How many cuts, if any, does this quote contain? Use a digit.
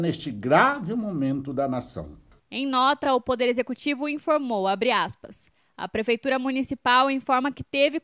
0